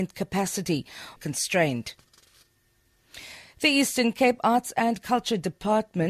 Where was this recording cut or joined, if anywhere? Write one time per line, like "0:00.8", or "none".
0:01.2